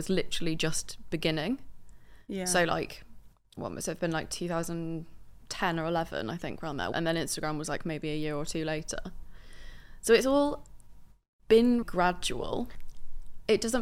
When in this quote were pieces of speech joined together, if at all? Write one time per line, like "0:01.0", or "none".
0:06.9
0:11.8